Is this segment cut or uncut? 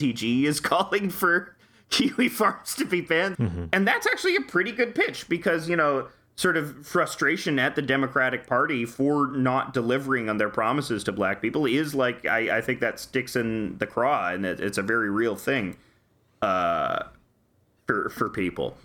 cut